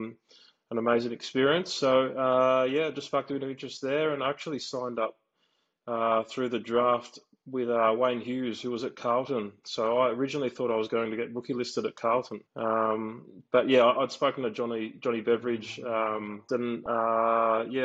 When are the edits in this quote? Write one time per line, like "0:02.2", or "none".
0:12.5
0:16.5